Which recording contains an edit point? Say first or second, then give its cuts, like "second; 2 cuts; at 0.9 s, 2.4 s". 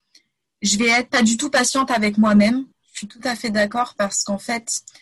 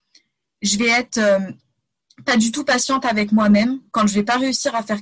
first; 2 cuts; at 1.1 s, 2.7 s